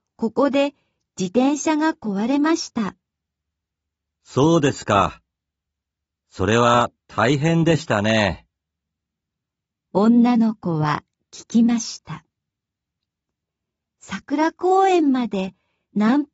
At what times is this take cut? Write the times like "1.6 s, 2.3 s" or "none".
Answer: none